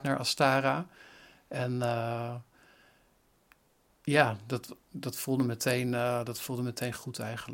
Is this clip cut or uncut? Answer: uncut